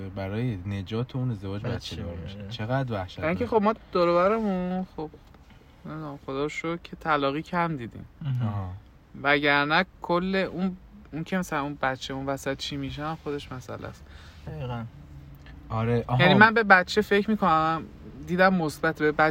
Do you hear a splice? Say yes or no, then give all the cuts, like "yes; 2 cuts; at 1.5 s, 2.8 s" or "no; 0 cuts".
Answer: no; 0 cuts